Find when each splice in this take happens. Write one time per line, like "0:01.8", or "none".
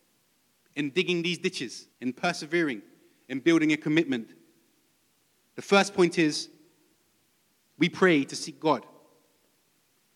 0:01.9